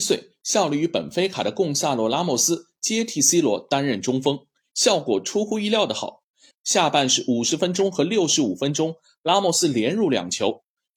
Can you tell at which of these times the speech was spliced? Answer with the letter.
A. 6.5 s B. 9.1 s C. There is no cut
A